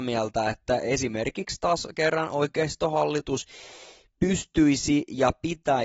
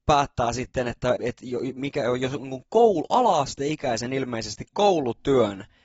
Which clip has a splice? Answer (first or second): second